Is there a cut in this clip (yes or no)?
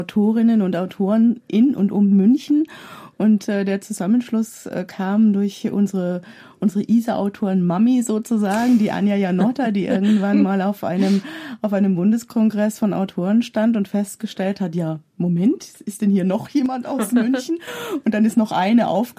no